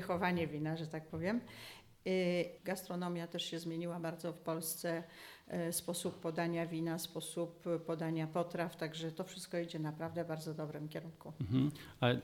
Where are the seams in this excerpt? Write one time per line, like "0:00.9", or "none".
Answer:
0:02.6